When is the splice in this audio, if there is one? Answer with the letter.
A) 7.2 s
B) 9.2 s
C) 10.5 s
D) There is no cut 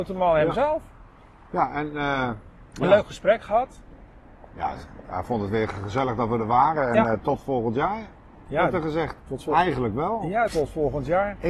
C